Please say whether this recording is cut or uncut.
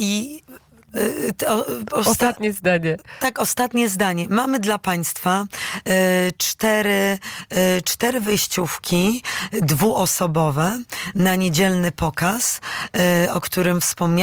uncut